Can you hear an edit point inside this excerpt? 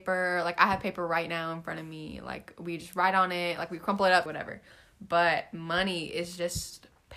yes; 1 cut; at 4.3 s

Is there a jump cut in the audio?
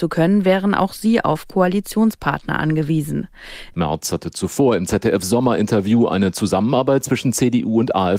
yes; 1 cut; at 3.7 s

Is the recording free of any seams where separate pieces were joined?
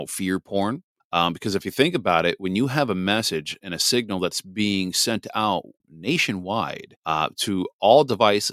no; 3 cuts; at 1.0 s, 5.8 s, 7.0 s

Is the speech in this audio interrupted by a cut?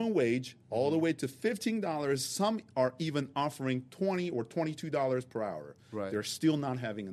no; 0 cuts

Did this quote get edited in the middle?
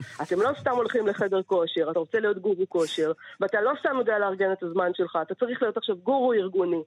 no; 0 cuts

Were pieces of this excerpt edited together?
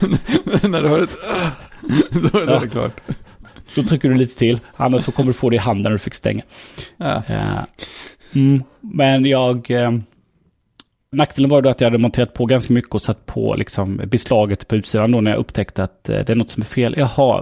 yes; 1 cut; at 11.1 s

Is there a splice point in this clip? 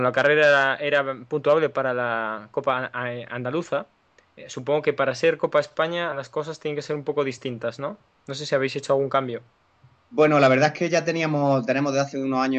no; 0 cuts

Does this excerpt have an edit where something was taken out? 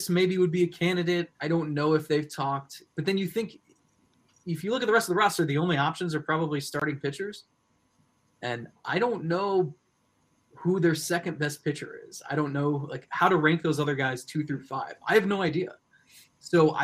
no; 0 cuts

